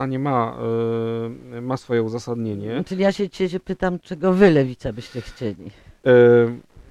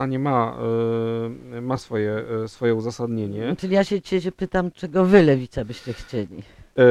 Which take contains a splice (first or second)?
first